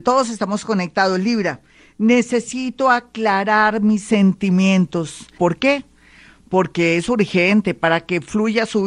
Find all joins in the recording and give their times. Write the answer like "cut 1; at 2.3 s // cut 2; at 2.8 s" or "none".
cut 1; at 5.4 s